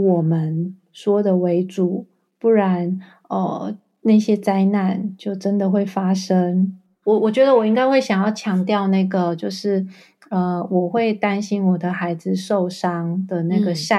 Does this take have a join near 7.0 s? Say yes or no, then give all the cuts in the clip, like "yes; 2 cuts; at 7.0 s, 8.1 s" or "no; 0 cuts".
yes; 1 cut; at 7.0 s